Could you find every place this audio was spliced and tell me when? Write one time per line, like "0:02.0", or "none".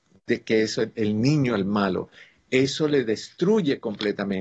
none